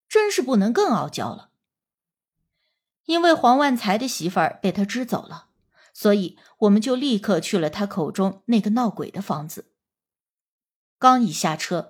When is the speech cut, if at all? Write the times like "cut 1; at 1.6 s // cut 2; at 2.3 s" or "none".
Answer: none